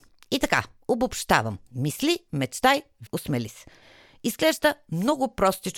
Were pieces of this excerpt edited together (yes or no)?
yes